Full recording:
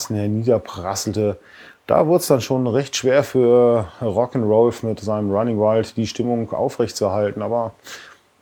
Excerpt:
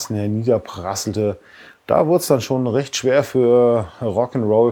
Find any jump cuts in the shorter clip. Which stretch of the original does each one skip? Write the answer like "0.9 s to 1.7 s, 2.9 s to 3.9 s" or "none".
none

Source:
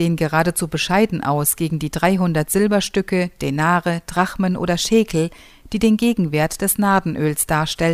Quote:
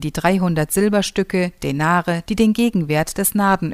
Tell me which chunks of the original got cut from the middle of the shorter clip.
4.0 s to 5.7 s

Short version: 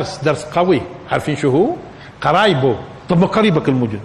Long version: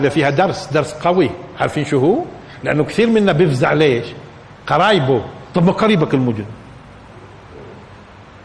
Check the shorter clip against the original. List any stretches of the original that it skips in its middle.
2.6 s to 4.6 s

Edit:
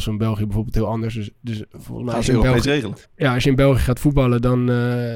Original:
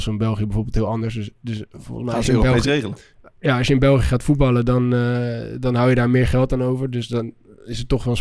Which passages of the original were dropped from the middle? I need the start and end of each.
3.0 s to 3.3 s

